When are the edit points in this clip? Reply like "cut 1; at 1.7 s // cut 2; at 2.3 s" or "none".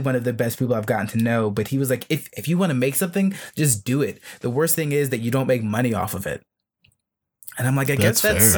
none